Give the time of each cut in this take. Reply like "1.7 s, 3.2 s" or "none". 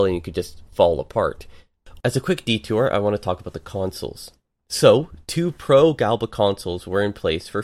2.0 s, 4.6 s